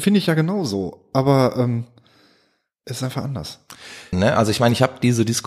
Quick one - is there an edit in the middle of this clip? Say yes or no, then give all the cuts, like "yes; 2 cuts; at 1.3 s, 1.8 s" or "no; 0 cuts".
yes; 1 cut; at 4.1 s